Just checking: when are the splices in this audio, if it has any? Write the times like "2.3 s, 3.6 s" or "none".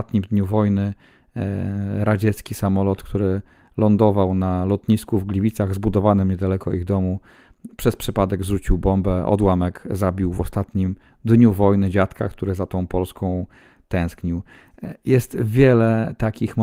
none